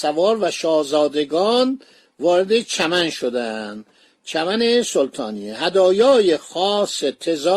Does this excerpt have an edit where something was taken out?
no; 0 cuts

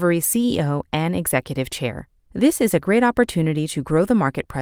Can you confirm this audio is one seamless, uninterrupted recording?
yes; 0 cuts

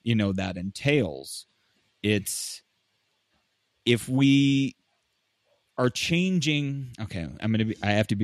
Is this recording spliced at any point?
no; 0 cuts

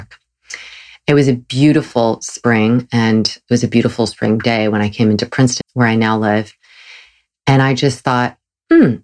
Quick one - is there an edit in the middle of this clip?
yes; 1 cut; at 5.6 s

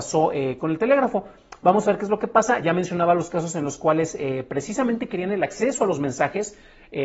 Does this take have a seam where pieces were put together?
no; 0 cuts

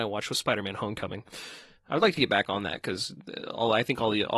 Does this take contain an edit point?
yes; 1 cut; at 1.7 s

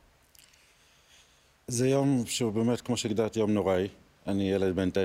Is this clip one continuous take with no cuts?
yes; 0 cuts

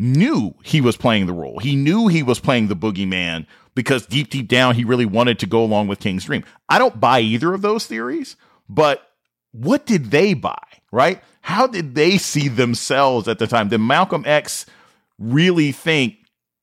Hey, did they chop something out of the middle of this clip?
no; 0 cuts

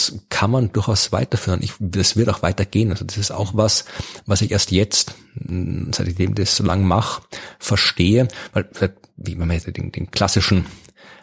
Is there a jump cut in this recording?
yes; 1 cut; at 9.6 s

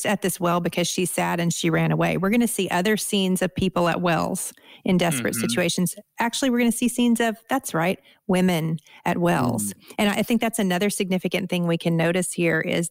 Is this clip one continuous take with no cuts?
no; 1 cut; at 10.0 s

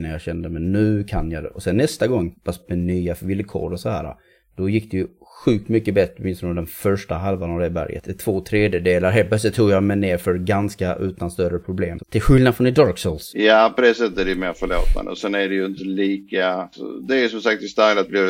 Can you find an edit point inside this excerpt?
yes; 2 cuts; at 2.4 s, 12.0 s

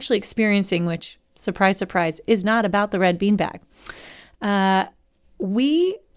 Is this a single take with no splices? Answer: yes; 0 cuts

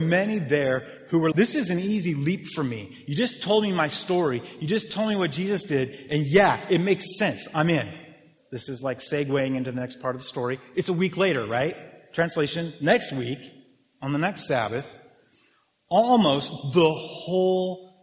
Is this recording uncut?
no; 2 cuts; at 1.3 s, 8.4 s

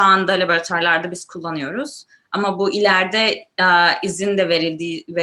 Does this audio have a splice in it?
no; 0 cuts

